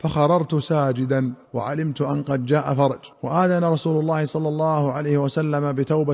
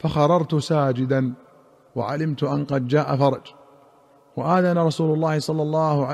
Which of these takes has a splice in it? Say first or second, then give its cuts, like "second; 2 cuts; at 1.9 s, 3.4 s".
first; 2 cuts; at 1.4 s, 3.1 s